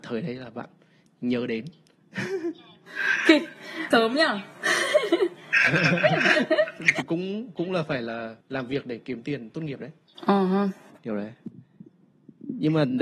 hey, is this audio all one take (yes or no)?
no